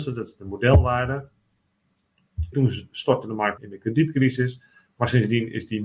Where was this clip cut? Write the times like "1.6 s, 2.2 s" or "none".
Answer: 2.5 s, 3.6 s